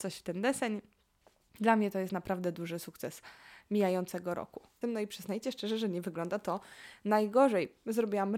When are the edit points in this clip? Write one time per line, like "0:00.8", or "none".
0:04.8

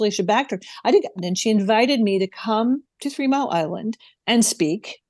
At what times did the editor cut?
0:01.2

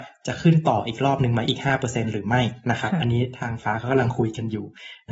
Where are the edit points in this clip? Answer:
0:03.6

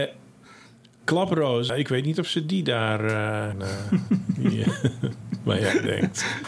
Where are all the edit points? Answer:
0:01.7
0:03.5

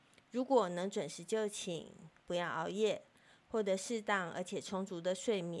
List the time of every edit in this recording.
none

